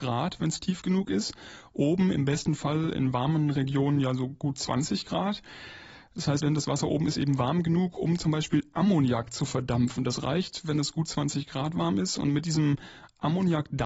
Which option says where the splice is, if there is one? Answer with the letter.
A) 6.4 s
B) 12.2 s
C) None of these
A